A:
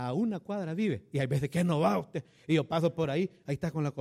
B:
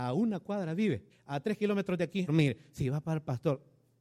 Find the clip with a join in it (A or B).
B